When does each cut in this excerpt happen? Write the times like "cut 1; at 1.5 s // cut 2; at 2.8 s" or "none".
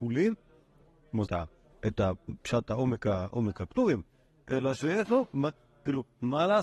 cut 1; at 1.3 s